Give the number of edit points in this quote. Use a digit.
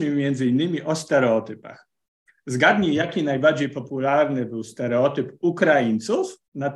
0